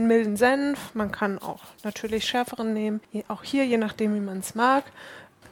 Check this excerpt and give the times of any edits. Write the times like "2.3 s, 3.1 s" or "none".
none